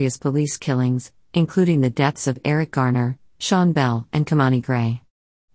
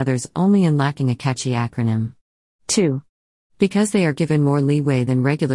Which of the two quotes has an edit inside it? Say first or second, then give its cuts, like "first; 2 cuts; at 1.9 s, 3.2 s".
second; 1 cut; at 3.5 s